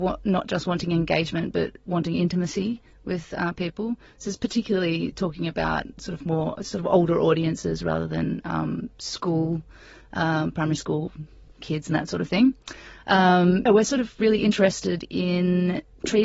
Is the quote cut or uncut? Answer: cut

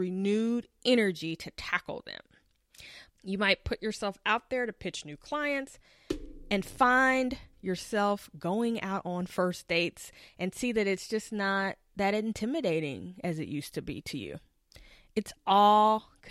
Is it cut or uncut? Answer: cut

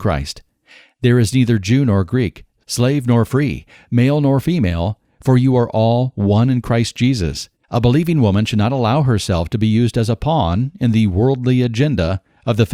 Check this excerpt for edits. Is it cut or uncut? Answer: cut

